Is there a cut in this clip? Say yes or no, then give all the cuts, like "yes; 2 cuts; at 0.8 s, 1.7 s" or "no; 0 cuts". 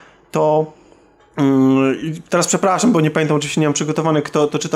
no; 0 cuts